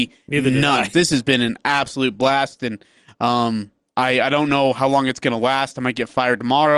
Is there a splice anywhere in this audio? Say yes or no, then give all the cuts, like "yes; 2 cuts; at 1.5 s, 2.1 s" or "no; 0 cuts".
yes; 1 cut; at 0.9 s